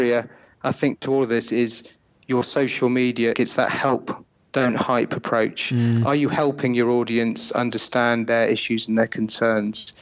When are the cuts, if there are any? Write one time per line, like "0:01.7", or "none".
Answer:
0:03.3